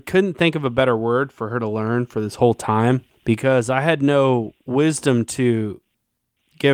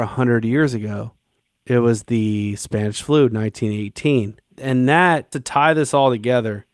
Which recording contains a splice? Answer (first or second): second